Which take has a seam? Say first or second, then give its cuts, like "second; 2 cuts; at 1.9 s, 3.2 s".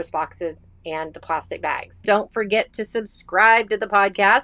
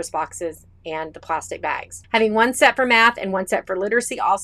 first; 1 cut; at 2.0 s